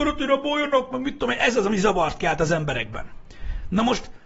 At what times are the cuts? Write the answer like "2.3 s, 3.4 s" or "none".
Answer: none